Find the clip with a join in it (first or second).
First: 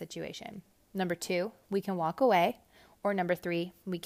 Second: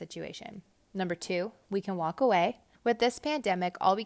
second